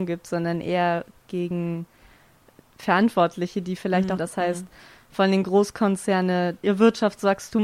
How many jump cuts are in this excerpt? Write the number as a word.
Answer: two